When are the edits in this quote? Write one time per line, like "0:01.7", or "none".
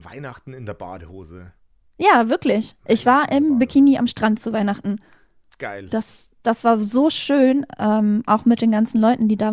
none